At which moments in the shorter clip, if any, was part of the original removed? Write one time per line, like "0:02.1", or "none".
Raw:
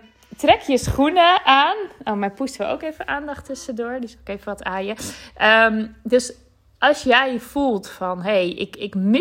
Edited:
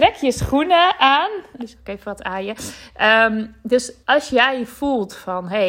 0:01.6
0:04.0